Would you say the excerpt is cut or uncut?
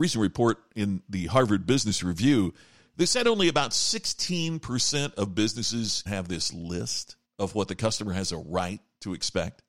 cut